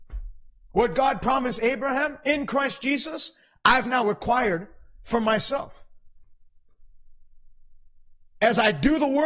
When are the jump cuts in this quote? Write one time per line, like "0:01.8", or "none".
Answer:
none